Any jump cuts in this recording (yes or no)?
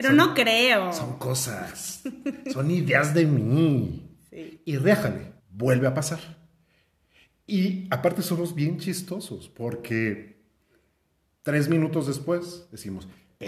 yes